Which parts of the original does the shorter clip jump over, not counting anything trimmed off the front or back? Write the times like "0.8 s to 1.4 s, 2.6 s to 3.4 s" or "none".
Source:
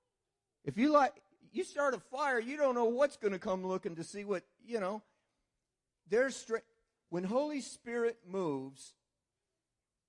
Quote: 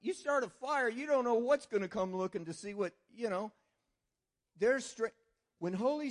none